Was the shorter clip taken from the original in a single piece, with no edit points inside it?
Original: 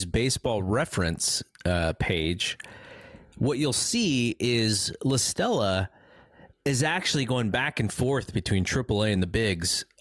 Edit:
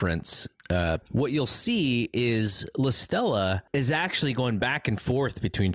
no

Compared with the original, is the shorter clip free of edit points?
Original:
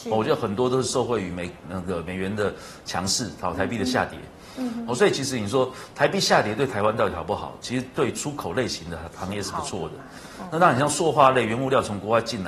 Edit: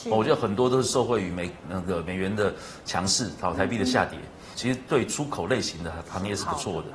no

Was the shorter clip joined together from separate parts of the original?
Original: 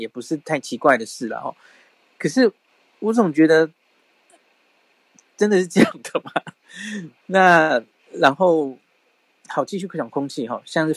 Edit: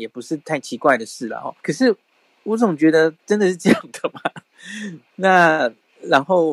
yes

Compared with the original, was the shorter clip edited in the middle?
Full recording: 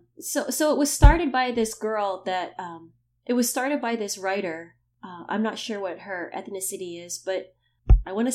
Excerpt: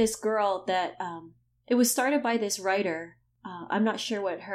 no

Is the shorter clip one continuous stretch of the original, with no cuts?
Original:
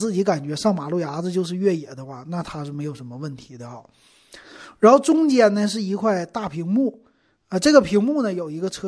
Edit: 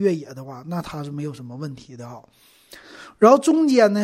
yes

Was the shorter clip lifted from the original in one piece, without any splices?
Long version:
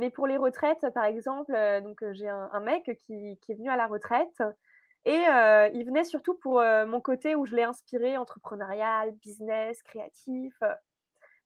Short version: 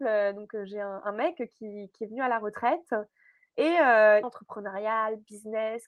no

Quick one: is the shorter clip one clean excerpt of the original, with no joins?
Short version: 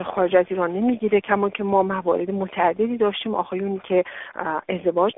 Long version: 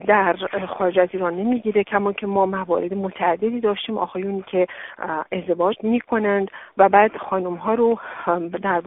yes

